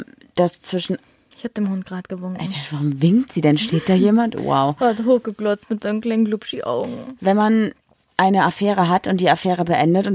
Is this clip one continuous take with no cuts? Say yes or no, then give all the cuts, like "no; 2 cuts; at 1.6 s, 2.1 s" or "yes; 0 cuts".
yes; 0 cuts